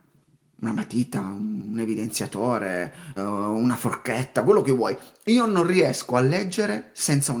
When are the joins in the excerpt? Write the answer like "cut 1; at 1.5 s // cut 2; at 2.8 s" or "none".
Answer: cut 1; at 3.2 s